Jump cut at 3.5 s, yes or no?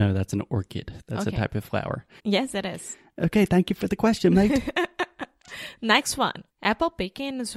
no